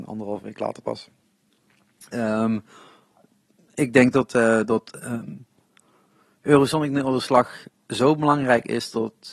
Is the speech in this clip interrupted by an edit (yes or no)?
no